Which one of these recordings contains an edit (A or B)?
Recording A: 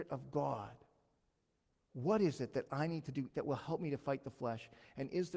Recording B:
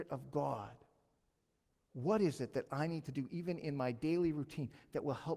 A